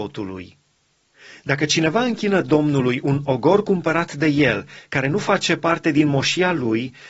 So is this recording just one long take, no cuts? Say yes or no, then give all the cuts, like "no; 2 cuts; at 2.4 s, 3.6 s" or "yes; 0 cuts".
yes; 0 cuts